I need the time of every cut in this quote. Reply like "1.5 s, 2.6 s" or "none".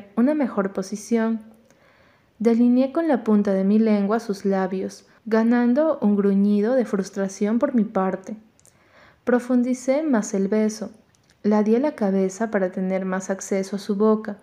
5.2 s